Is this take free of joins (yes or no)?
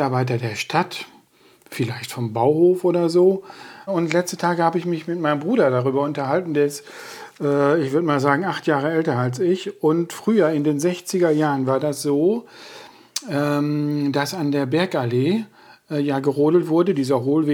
no